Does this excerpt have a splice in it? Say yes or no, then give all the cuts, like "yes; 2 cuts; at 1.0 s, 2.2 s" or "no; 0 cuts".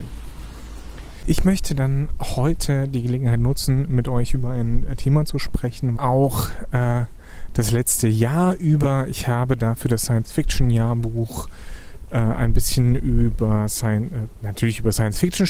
yes; 1 cut; at 6.0 s